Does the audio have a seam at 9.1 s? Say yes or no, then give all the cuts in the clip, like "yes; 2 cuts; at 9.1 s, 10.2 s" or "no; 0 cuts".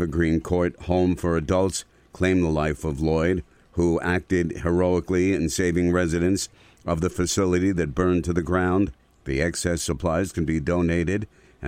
yes; 1 cut; at 9.1 s